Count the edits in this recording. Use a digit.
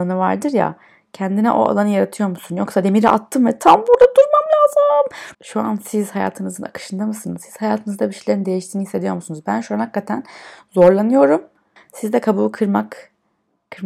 2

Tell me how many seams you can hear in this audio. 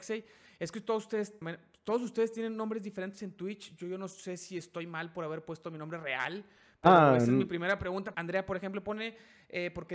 2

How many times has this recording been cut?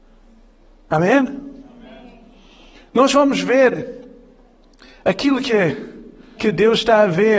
1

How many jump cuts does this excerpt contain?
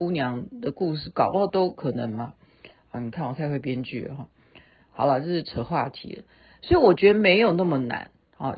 0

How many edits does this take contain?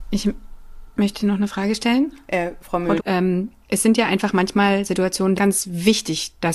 2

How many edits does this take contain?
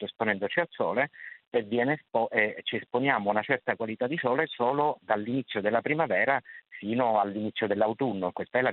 0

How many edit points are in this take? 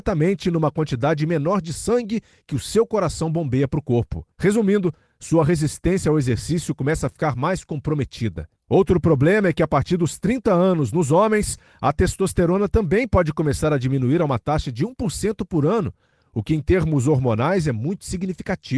1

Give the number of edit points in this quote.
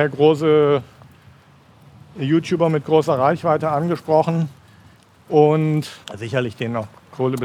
1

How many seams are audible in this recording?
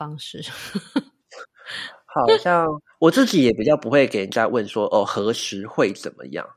0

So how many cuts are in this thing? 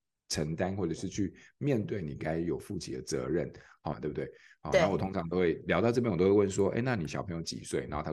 1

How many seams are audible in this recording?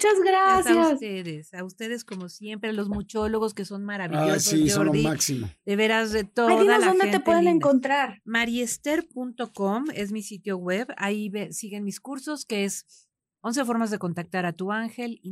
0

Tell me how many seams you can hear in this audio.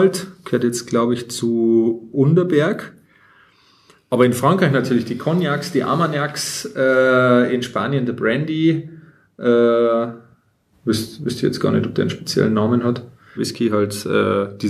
2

